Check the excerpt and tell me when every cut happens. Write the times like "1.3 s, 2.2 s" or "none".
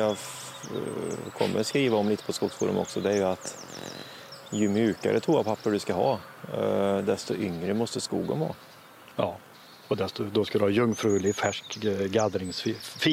none

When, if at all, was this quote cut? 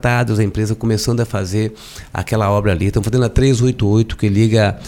none

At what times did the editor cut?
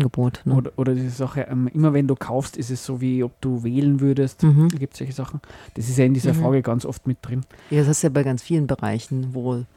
5.7 s

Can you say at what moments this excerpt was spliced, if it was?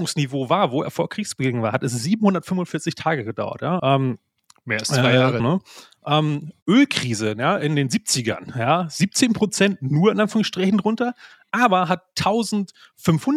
3.8 s, 5.4 s

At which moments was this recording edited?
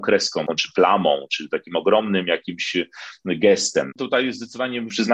3.9 s

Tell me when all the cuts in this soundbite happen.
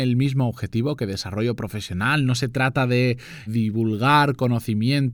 3.5 s

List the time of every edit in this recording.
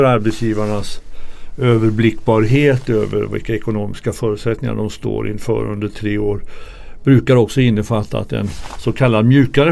none

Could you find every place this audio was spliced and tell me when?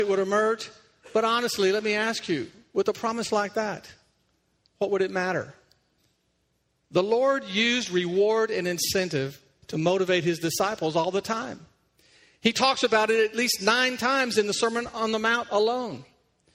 none

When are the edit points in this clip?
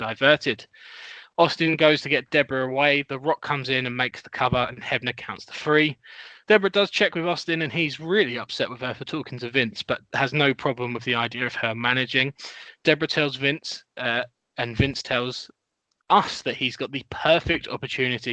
6.4 s

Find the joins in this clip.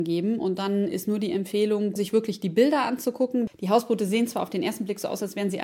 2.0 s

